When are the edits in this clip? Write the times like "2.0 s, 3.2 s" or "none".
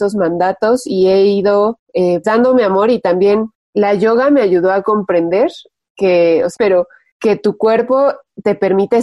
2.2 s, 6.6 s